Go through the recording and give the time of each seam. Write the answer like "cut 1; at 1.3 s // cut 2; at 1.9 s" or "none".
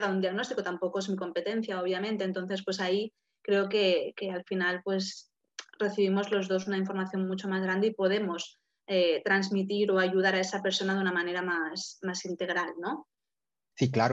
none